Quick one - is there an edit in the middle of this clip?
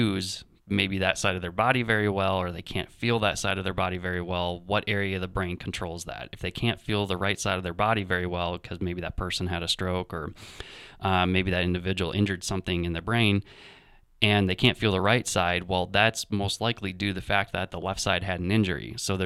no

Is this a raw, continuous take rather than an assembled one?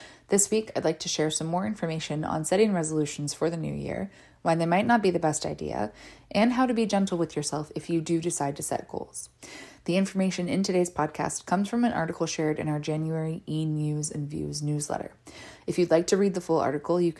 yes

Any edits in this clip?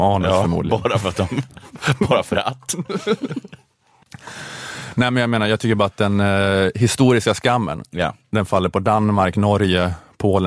no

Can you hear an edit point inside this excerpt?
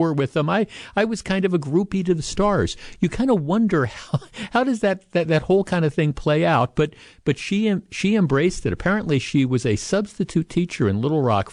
no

